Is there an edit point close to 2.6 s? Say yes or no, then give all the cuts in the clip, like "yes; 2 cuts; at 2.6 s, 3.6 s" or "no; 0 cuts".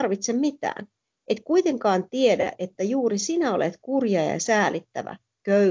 no; 0 cuts